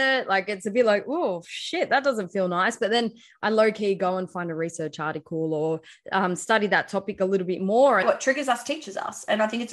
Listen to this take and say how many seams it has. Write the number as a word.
one